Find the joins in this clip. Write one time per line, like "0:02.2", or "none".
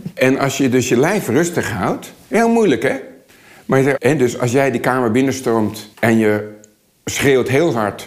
0:04.0
0:05.9